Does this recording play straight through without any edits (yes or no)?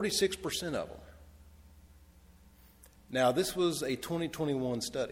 yes